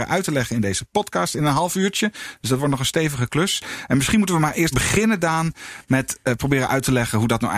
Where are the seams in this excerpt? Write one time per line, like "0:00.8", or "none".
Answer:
0:04.7